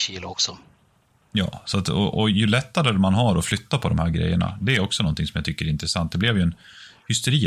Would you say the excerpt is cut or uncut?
uncut